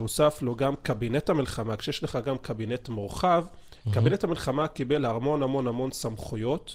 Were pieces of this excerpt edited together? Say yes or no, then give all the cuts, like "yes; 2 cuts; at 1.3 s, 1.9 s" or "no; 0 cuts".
no; 0 cuts